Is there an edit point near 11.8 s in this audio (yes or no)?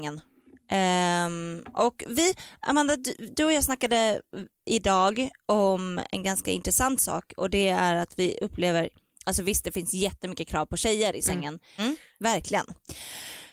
yes